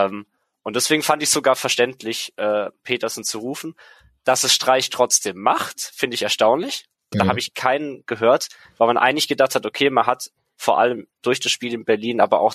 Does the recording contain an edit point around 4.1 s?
no; 1 cut; at 7.1 s

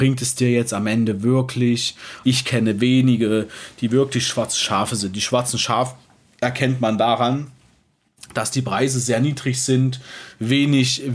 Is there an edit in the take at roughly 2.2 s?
yes; 1 cut; at 2.2 s

